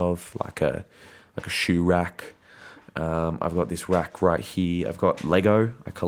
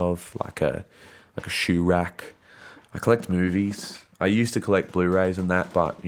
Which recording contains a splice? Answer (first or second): second